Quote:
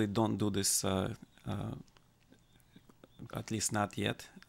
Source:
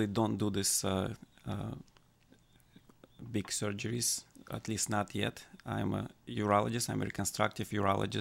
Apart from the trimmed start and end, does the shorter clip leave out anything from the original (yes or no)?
yes